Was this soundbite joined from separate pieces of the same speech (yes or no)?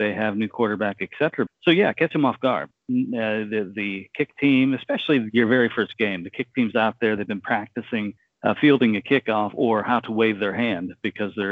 yes